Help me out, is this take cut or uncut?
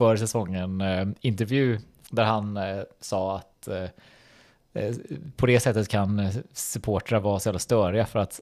cut